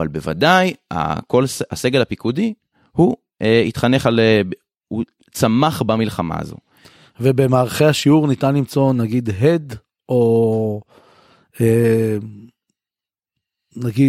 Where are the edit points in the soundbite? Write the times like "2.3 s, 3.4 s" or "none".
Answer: none